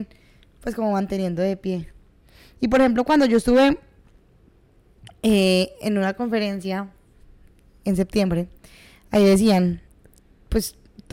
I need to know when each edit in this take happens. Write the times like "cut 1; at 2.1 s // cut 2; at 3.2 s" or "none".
none